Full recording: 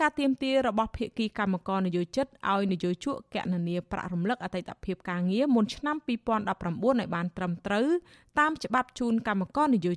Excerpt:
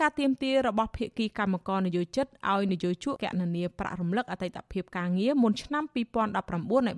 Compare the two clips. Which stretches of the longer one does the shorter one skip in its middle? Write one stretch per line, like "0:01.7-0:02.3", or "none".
0:03.2-0:03.3